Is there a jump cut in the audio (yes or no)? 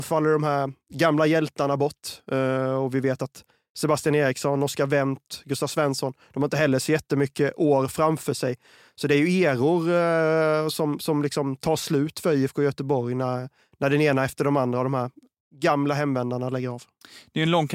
no